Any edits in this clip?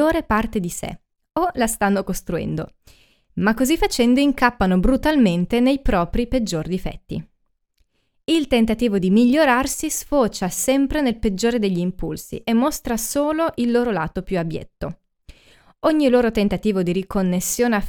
no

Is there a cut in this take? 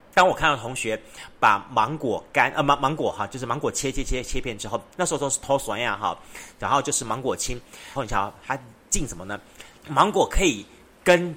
yes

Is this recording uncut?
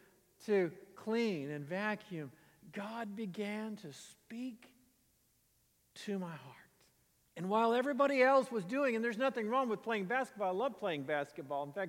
no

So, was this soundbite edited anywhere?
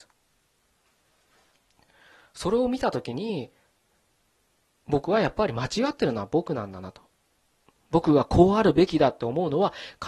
no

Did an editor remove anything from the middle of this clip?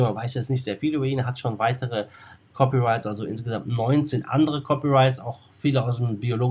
no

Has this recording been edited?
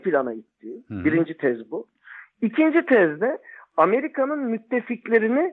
no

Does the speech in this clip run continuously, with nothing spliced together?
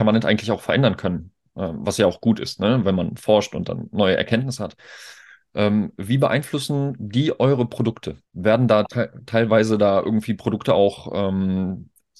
no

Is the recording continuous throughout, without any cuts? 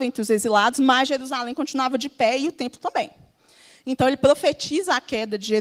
yes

